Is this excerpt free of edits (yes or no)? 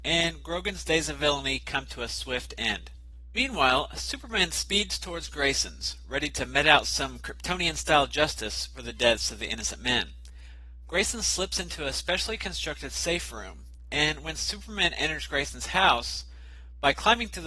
yes